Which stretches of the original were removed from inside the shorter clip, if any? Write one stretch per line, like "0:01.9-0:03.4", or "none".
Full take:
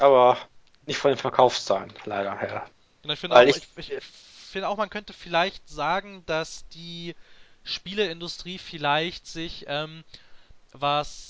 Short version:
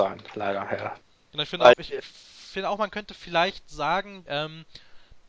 0:03.4-0:03.7
0:06.2-0:09.6